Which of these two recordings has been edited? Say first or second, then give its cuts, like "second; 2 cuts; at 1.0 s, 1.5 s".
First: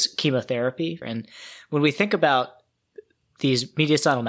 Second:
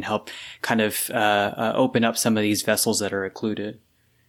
first; 1 cut; at 1.0 s